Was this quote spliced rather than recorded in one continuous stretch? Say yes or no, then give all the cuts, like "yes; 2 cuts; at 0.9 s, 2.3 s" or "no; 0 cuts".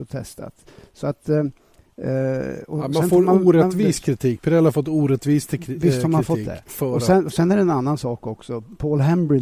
no; 0 cuts